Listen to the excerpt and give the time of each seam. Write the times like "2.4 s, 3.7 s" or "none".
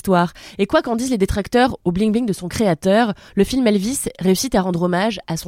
none